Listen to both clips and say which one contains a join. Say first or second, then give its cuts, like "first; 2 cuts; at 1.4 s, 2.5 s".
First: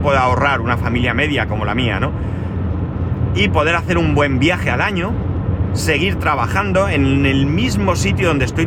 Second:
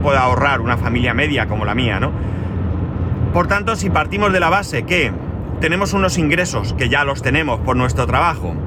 second; 1 cut; at 3.3 s